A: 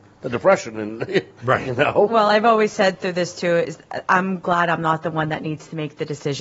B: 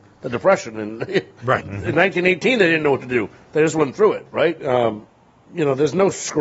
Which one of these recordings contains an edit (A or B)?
B